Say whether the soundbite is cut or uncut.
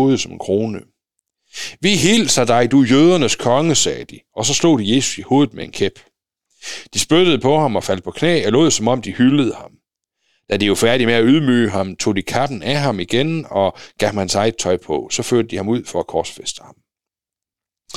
uncut